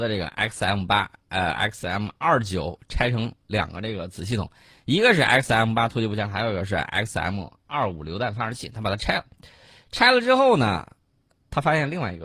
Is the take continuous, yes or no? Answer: yes